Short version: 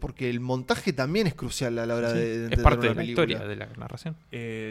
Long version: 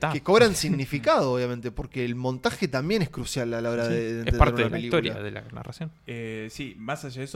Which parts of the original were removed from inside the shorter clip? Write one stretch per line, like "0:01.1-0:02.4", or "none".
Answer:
none